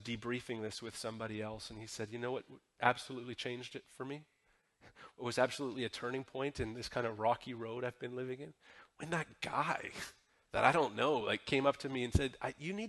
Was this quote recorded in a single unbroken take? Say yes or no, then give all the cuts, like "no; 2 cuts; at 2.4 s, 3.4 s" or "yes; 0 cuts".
yes; 0 cuts